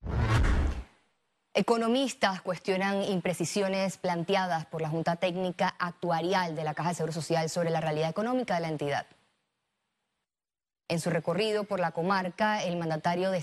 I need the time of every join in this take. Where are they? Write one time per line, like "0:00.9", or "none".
0:10.9

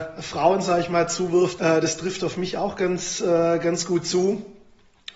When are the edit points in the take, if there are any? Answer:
0:01.6

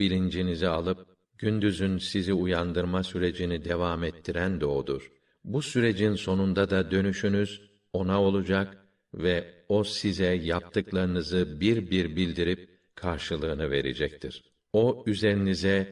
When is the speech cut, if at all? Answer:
0:14.6

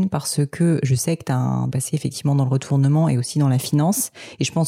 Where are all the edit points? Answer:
0:01.7

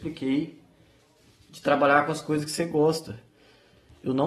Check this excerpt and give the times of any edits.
none

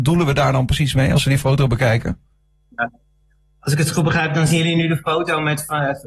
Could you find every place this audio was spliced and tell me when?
none

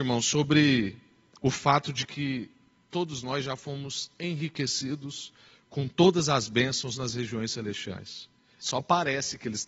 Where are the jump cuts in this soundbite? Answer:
0:08.6

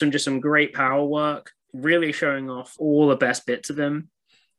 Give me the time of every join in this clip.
0:01.6
0:02.8

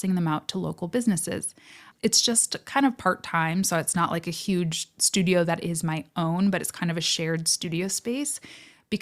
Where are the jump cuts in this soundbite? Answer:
0:01.9

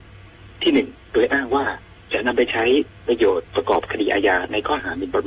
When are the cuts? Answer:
0:01.0

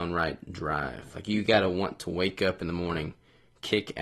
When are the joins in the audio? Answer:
none

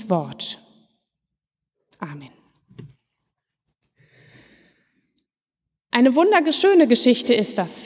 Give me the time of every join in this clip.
none

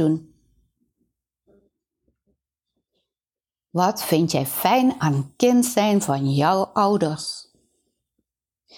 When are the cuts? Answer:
none

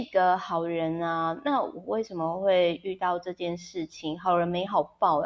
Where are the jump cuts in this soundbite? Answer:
none

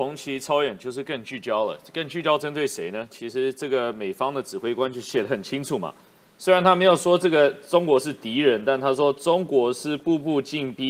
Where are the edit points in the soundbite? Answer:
none

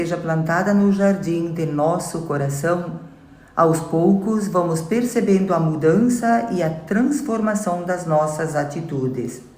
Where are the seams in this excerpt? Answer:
none

